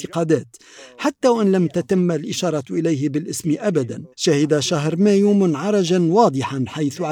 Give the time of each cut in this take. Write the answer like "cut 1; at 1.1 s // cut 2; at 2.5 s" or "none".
cut 1; at 4.1 s